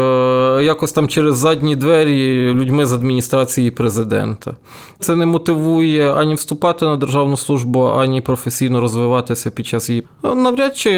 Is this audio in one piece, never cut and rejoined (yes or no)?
no